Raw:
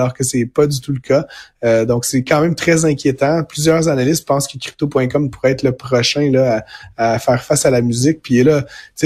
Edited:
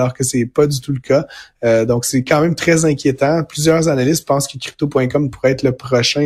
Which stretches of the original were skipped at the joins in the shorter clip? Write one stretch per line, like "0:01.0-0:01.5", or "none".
none

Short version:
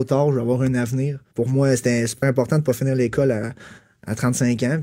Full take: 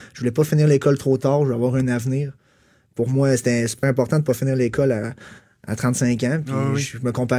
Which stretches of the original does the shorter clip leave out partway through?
0:02.4-0:02.9

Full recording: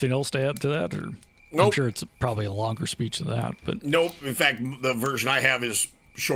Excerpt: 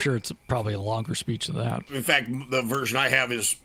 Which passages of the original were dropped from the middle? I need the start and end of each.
0:03.6-0:04.2

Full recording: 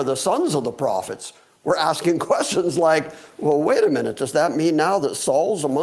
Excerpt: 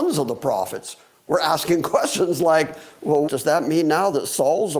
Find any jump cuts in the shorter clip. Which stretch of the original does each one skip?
0:03.6-0:04.2

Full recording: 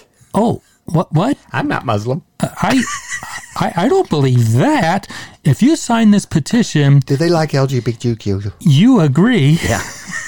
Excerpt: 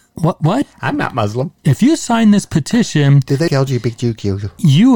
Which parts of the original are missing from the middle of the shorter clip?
0:02.3-0:05.4
0:07.3-0:07.5

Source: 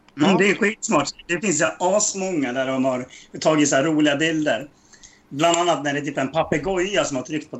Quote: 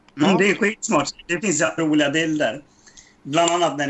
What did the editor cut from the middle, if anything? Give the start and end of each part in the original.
0:01.8-0:03.8

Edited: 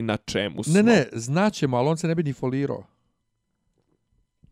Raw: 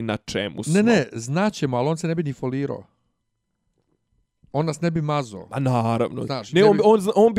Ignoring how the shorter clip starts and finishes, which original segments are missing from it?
none

